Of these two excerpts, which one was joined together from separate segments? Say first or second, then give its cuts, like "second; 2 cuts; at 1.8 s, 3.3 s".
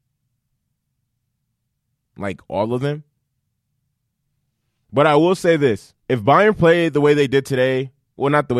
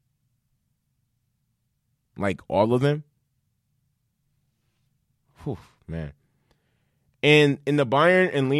first; 2 cuts; at 4.8 s, 6.0 s